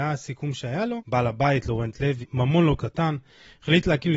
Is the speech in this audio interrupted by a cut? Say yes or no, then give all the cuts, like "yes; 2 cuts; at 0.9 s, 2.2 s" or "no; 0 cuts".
yes; 2 cuts; at 1.0 s, 2.2 s